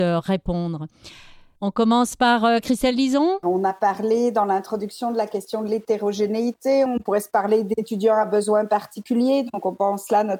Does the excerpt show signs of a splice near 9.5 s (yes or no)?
no